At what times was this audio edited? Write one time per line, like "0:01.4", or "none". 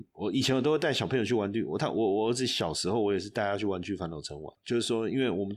0:04.6